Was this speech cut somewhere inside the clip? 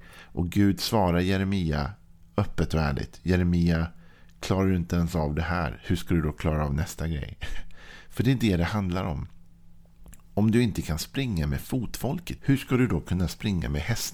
yes; 1 cut; at 12.4 s

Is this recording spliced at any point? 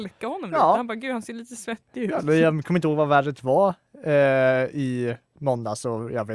no; 0 cuts

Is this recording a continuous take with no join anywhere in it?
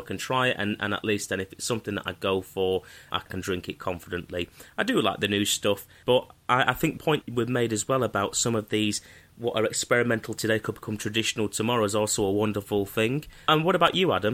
yes; 0 cuts

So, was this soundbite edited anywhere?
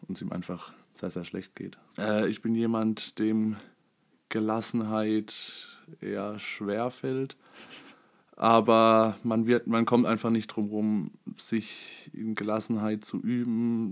yes; 1 cut; at 1.9 s

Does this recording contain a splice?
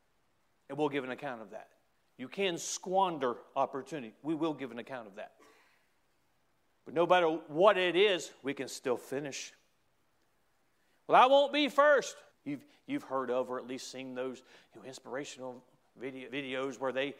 yes; 2 cuts; at 12.3 s, 16.3 s

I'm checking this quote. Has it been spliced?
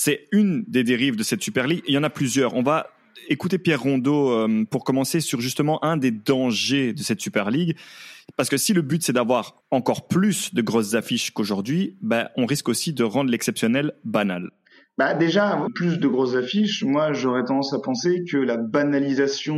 yes; 2 cuts; at 9.6 s, 15.7 s

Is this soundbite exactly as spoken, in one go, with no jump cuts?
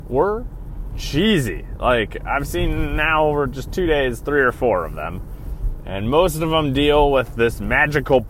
yes; 0 cuts

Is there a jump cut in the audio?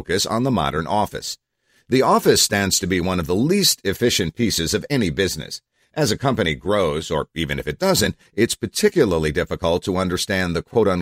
no; 0 cuts

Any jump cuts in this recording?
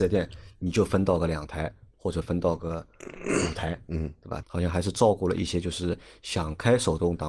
yes; 1 cut; at 4.4 s

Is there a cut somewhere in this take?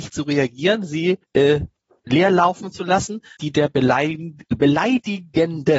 yes; 2 cuts; at 1.2 s, 3.4 s

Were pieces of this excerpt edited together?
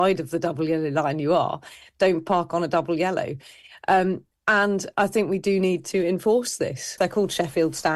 yes; 1 cut; at 7.0 s

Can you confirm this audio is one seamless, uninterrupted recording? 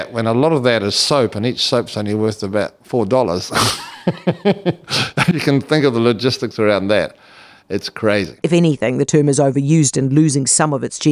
no; 1 cut; at 8.4 s

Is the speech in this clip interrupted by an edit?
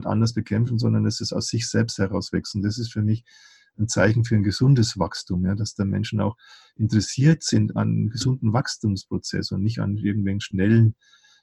no; 0 cuts

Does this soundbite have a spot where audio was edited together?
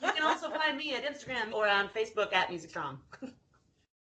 yes; 1 cut; at 1.5 s

